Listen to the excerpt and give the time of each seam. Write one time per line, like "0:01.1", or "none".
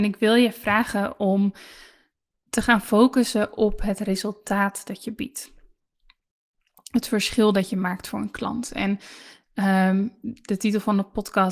none